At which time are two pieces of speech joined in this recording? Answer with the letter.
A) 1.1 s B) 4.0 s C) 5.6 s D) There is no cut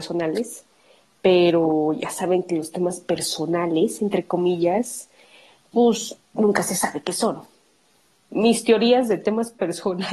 D